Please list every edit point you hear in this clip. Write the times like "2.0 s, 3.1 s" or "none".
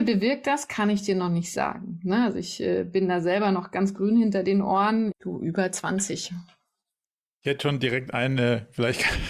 5.1 s, 7.3 s